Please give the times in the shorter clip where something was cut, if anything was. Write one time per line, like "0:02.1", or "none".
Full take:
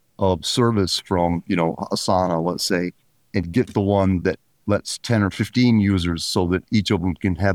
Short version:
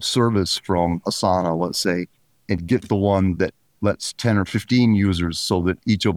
0:01.0